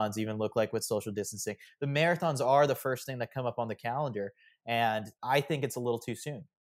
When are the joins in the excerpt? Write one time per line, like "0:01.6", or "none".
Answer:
none